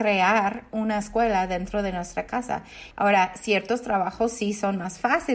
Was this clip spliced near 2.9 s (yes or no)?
yes